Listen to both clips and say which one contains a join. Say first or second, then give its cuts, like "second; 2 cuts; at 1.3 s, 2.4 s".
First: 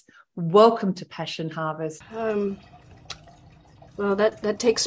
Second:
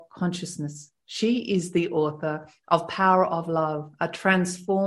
first; 1 cut; at 2.0 s